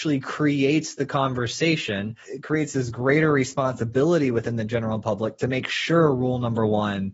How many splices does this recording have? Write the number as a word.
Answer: one